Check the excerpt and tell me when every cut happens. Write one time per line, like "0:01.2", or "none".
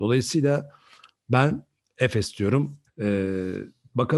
0:02.9